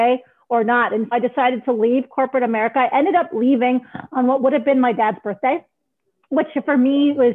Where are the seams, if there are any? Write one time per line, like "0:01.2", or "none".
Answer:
0:01.1